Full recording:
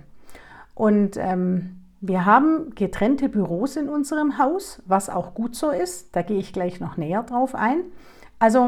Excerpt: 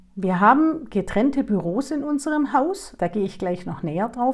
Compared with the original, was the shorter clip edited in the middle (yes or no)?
yes